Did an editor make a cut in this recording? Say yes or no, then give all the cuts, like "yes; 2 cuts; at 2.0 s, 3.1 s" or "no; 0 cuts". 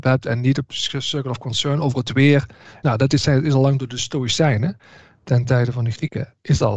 no; 0 cuts